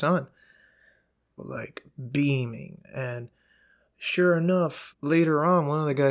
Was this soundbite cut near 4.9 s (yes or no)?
yes